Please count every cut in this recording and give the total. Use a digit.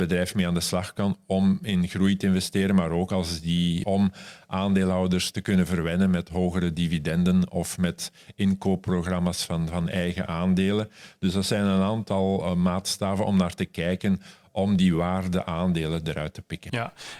1